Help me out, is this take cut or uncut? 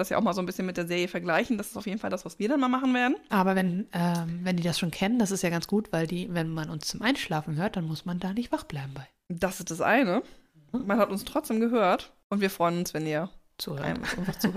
uncut